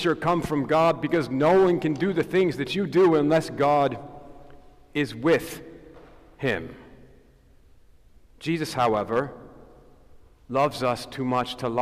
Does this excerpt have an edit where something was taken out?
no; 0 cuts

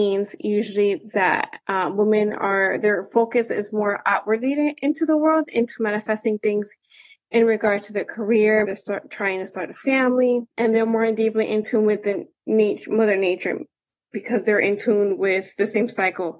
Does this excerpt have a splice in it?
yes; 2 cuts; at 8.6 s, 10.5 s

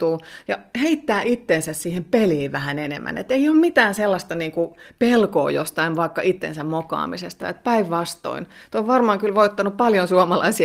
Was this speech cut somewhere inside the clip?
no; 0 cuts

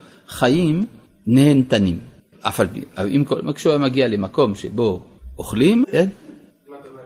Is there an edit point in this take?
yes; 2 cuts; at 2.3 s, 5.8 s

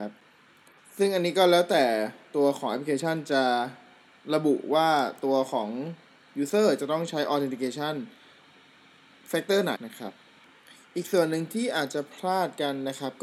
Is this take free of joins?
no; 1 cut; at 9.7 s

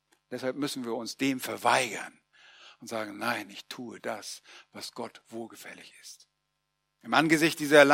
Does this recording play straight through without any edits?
no; 1 cut; at 7.0 s

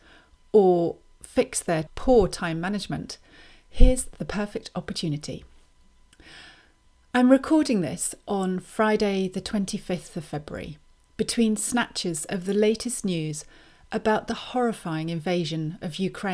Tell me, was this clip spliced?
no; 0 cuts

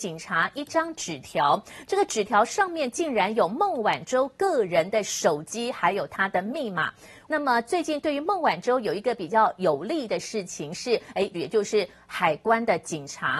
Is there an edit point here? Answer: yes; 2 cuts; at 7.3 s, 11.3 s

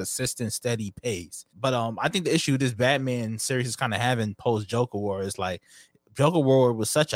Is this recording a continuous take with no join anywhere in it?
no; 1 cut; at 1.5 s

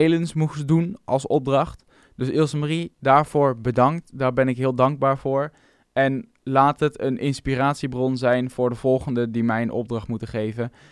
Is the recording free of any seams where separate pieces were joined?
yes; 0 cuts

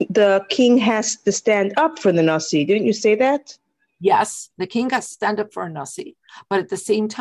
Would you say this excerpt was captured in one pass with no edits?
yes; 0 cuts

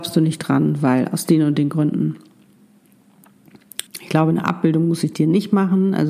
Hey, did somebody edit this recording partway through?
yes; 1 cut; at 3.9 s

